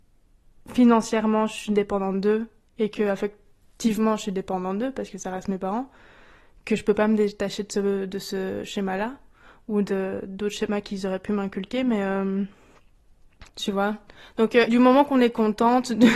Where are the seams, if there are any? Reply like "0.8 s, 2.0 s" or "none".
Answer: 13.5 s, 14.7 s